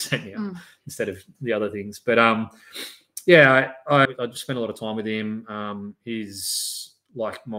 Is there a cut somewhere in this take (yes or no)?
yes